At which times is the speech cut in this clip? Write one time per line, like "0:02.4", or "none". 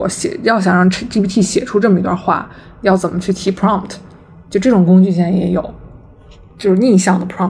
none